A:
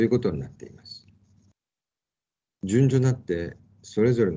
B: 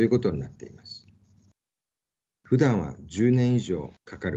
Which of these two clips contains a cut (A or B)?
B